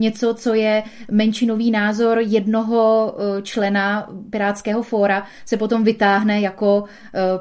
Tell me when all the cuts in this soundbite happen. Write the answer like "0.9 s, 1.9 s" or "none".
none